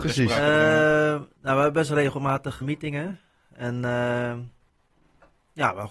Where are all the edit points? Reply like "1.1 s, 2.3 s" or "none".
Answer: 2.6 s